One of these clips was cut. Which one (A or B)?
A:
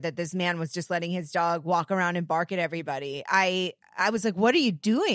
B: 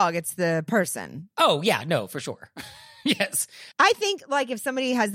B